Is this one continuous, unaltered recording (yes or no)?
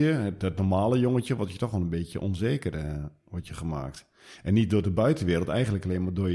yes